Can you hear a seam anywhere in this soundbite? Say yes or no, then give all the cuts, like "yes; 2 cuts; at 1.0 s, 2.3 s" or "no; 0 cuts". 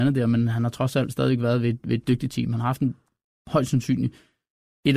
no; 0 cuts